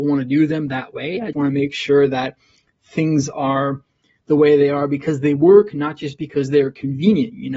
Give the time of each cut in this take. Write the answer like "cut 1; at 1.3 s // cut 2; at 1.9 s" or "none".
cut 1; at 1.3 s

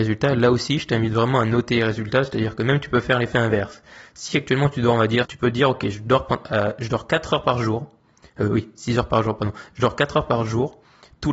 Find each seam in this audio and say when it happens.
cut 1; at 5.2 s

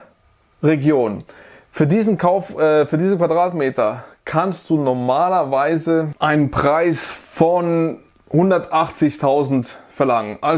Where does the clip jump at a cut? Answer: none

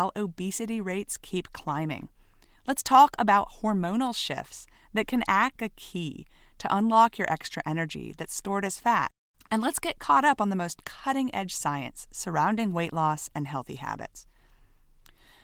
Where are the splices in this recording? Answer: cut 1; at 5.6 s

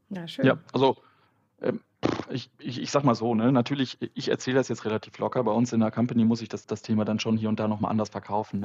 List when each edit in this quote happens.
cut 1; at 6.6 s

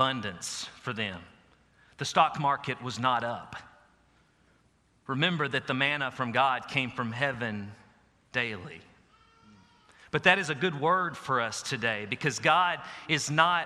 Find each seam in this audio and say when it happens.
none

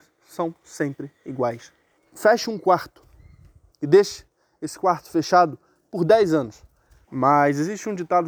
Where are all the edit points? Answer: cut 1; at 2.0 s // cut 2; at 7.0 s

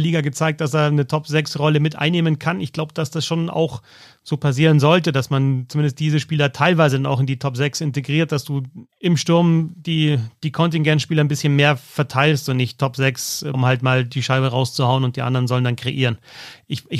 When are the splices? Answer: cut 1; at 8.9 s // cut 2; at 13.5 s

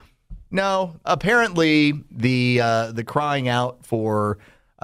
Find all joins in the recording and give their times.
cut 1; at 1.0 s

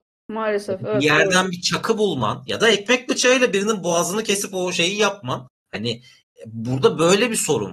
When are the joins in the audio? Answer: cut 1; at 5.5 s

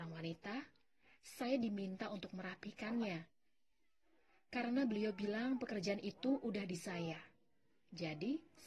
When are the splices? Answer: none

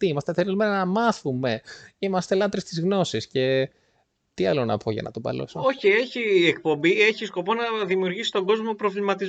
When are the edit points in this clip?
none

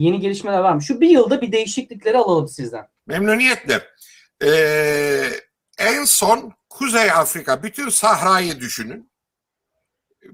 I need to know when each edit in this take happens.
cut 1; at 3.0 s // cut 2; at 6.6 s

